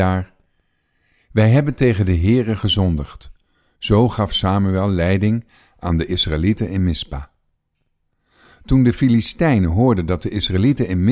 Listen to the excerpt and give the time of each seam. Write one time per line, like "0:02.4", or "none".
none

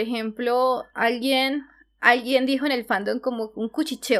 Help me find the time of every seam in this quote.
none

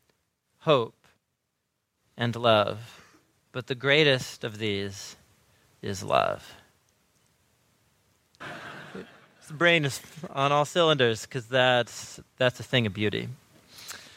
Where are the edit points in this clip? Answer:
0:08.4

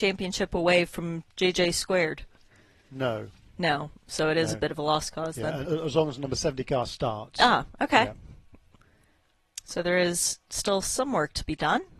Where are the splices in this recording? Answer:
0:05.6

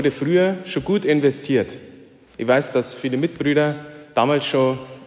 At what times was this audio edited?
none

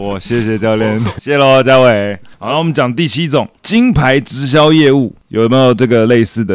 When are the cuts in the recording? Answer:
0:01.2

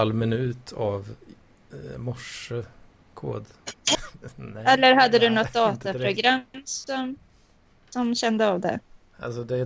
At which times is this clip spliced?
0:03.9

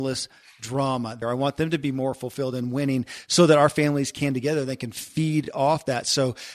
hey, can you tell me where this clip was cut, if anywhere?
0:01.2

